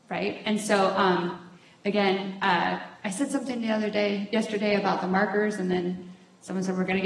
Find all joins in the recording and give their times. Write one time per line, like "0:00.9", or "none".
none